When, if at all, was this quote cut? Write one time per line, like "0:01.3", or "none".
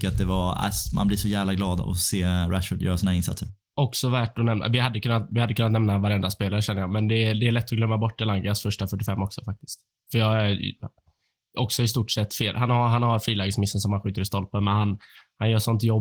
none